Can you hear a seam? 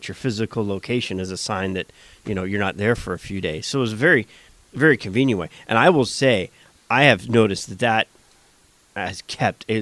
no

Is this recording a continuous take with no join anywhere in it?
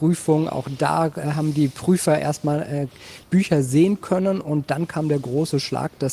no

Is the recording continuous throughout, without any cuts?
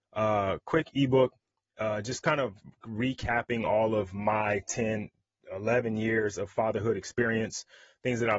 yes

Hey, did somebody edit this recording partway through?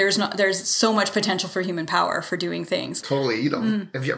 yes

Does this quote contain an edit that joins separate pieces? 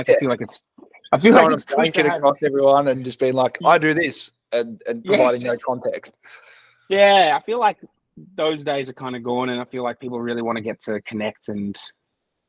no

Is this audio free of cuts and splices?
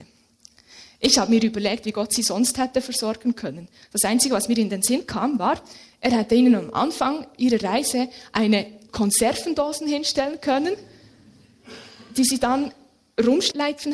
no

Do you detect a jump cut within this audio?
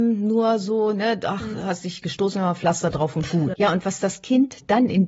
yes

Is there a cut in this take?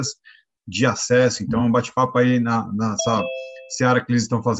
no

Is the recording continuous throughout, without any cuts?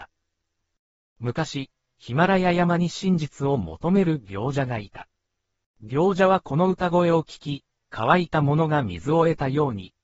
no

